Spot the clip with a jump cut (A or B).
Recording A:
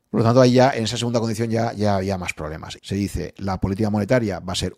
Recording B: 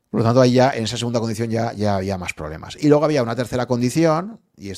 A